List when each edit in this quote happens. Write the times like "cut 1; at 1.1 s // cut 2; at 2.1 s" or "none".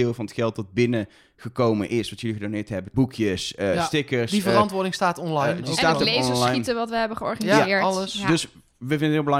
cut 1; at 2.9 s